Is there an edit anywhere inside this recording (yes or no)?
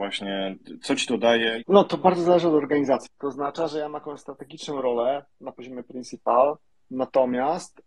yes